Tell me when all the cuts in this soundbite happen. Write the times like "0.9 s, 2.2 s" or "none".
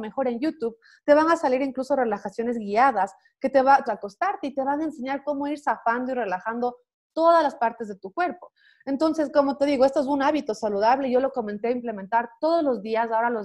3.8 s

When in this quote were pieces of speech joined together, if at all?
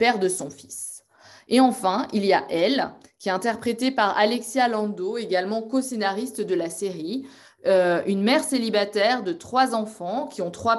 none

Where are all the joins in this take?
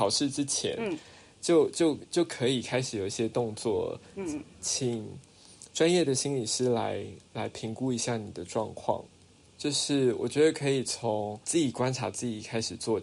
9.5 s, 11.4 s

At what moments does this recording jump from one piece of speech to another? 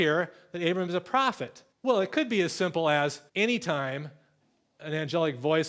1.7 s, 3.3 s

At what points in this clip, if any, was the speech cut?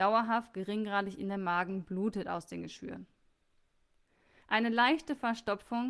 4.4 s

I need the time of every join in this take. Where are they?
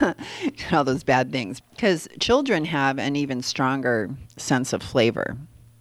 1.6 s

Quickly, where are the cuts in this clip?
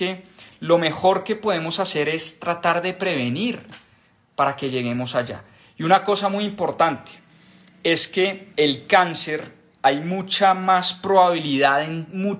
8.5 s

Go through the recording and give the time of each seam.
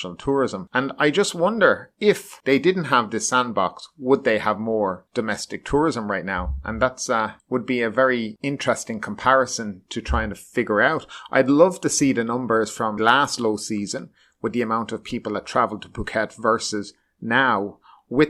13.0 s

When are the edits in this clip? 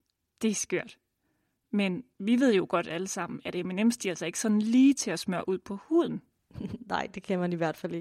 none

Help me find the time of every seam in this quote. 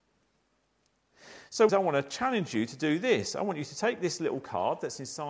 1.7 s

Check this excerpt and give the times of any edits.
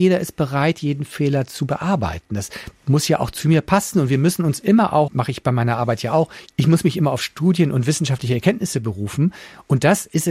3.9 s, 5.1 s

